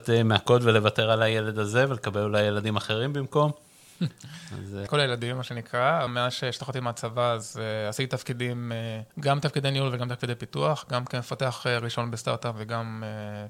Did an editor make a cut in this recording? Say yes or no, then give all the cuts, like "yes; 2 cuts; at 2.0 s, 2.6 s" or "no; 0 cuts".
yes; 3 cuts; at 4.9 s, 6.1 s, 9.1 s